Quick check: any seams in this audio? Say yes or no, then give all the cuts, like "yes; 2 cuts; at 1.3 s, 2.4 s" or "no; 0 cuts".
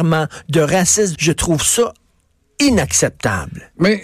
yes; 1 cut; at 1.1 s